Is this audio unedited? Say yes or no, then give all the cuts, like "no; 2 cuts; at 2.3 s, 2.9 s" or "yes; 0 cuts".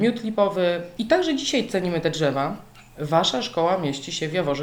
no; 1 cut; at 1.0 s